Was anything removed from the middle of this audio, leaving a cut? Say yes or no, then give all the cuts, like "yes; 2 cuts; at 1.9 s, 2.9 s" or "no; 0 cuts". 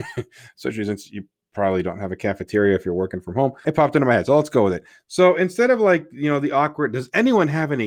yes; 1 cut; at 3.6 s